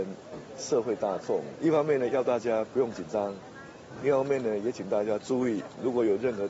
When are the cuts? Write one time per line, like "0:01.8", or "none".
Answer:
none